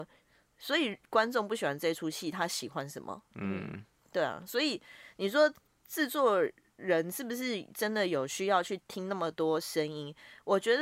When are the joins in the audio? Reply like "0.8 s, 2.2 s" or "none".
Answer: 3.3 s